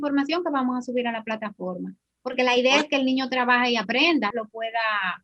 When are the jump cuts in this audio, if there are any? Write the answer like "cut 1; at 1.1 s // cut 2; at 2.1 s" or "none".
cut 1; at 4.3 s